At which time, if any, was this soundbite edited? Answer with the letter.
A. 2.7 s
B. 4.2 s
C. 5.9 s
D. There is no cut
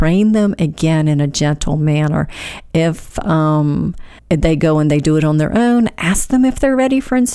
B